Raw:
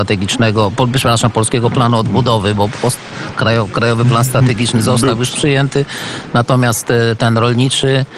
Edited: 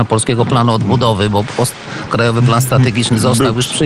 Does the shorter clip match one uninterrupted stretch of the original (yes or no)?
no